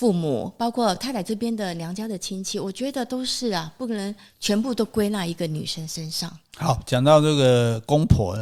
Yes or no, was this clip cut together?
no